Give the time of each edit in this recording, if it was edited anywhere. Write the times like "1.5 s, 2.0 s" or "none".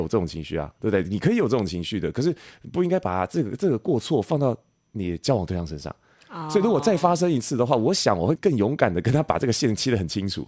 8.4 s